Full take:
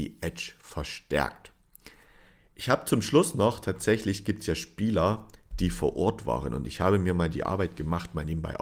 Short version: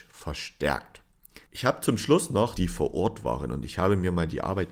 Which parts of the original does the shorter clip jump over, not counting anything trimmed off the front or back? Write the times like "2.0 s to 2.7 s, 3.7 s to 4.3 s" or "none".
2.0 s to 2.5 s, 3.6 s to 5.6 s